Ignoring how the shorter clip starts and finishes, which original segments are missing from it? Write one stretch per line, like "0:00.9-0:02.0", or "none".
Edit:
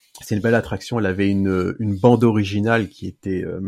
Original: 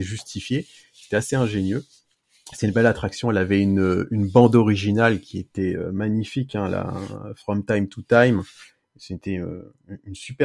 none